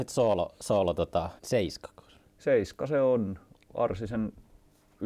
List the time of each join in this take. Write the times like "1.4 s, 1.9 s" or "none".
1.4 s